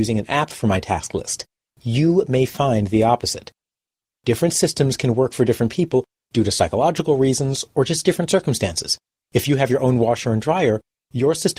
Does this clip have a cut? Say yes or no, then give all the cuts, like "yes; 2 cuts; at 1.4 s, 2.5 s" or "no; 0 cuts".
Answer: no; 0 cuts